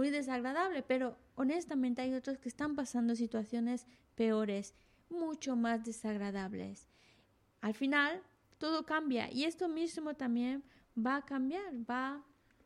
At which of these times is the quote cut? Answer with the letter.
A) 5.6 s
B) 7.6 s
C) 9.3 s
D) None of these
B